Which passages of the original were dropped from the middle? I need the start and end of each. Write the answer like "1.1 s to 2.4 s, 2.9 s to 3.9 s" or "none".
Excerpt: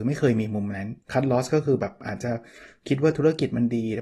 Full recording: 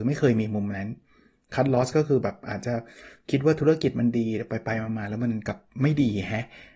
1.0 s to 1.4 s